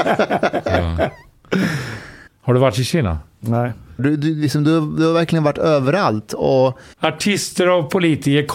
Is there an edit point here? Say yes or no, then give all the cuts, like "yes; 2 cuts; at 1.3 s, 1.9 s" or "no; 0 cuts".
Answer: yes; 3 cuts; at 2.3 s, 4.0 s, 6.9 s